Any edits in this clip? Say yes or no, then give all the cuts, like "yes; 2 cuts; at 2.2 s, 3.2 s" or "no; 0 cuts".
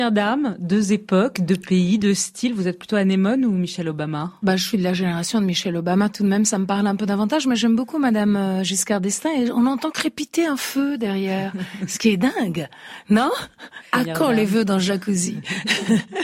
no; 0 cuts